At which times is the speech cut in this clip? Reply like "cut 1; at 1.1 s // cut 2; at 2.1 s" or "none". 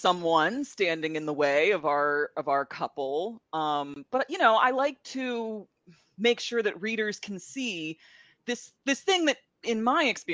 none